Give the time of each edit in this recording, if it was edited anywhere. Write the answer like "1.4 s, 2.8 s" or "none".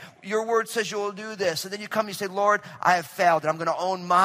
none